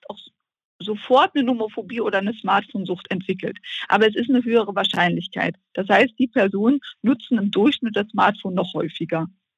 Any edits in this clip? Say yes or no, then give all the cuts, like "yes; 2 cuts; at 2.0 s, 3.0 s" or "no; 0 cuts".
no; 0 cuts